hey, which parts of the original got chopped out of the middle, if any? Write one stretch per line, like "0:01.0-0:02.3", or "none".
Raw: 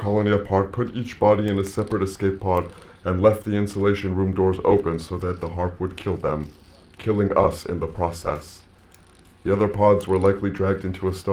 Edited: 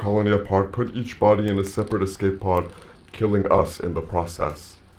0:03.0-0:06.8